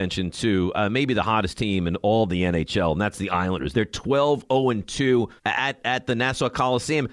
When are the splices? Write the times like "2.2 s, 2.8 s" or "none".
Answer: 3.7 s, 5.4 s

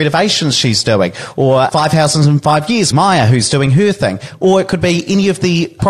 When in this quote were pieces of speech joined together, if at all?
2.9 s

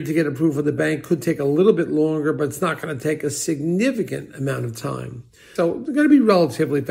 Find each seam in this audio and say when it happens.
5.6 s

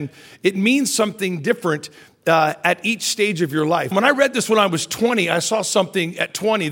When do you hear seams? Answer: 3.9 s

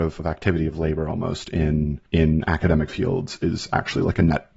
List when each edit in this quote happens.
2.1 s

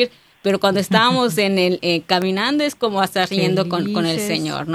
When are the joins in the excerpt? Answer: 1.8 s

